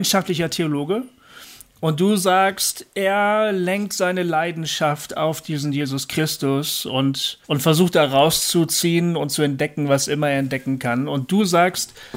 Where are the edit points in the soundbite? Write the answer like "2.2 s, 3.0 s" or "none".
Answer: 7.4 s